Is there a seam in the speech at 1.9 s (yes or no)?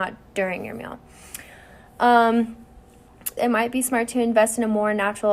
no